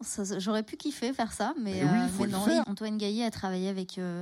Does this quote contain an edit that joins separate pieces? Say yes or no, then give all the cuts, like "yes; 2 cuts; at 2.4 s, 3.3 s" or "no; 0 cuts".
yes; 1 cut; at 2.6 s